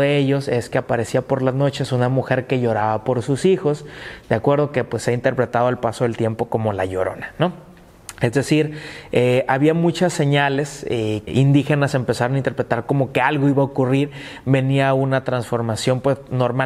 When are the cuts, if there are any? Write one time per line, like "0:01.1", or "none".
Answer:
0:11.3